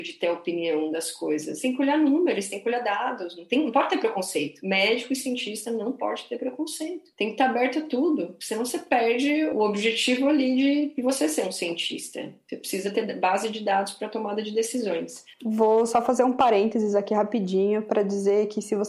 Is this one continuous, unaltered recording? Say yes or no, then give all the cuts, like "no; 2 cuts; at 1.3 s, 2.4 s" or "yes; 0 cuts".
yes; 0 cuts